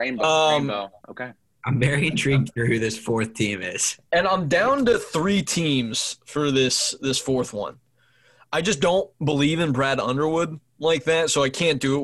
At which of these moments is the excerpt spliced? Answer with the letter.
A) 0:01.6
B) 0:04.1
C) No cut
A